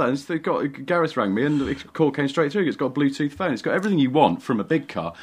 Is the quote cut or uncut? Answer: uncut